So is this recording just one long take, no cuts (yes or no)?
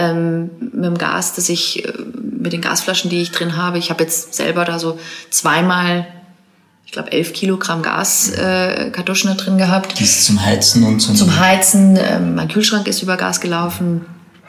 yes